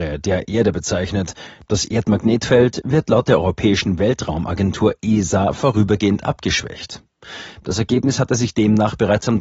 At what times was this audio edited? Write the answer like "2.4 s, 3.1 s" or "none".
7.6 s